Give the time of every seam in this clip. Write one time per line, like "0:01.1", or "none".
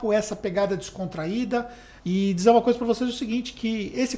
0:02.0